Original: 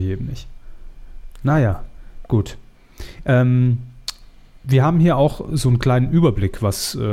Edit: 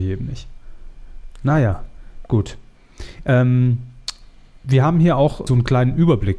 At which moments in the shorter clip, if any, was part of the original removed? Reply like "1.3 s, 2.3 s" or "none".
5.5 s